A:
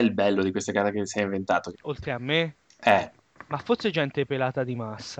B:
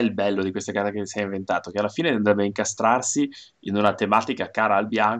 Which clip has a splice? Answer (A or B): A